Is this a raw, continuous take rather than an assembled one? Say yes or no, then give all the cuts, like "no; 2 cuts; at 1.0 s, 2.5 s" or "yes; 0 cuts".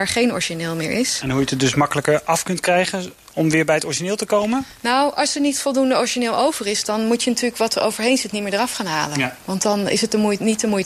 yes; 0 cuts